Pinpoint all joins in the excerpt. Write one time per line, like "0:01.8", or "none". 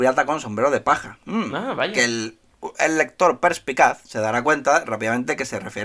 none

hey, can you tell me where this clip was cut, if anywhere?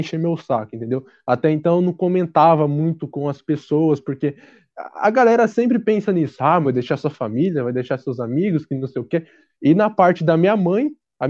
0:06.6
0:09.6

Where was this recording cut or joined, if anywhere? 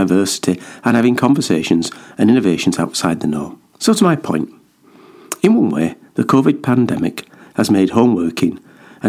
0:03.7

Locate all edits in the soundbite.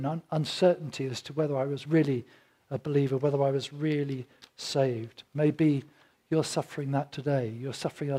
none

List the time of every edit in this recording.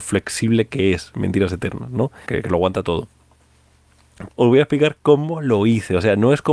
0:02.3
0:04.3

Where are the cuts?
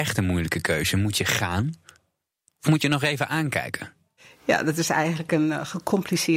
none

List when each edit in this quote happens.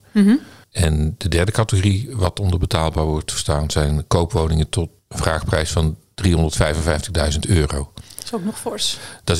none

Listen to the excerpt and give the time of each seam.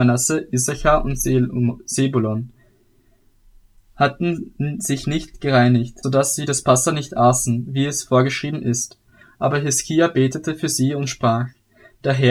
0:06.0

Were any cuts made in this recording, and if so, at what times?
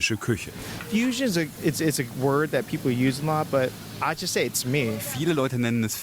none

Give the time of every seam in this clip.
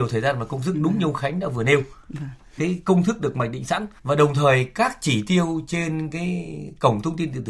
0:02.6
0:04.0

